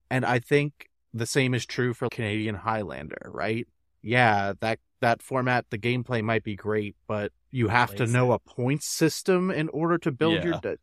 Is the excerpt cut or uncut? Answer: uncut